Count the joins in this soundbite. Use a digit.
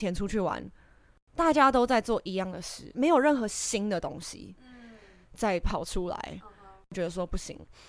1